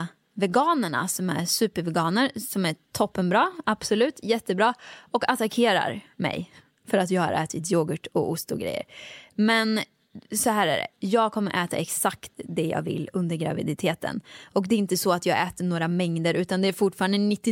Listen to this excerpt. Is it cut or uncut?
uncut